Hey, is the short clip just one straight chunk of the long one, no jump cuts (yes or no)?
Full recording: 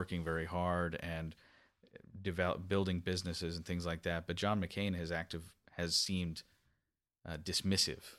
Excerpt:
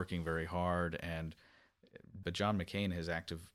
no